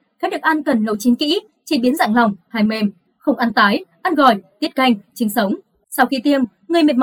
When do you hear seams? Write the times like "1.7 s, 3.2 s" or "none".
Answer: 3.1 s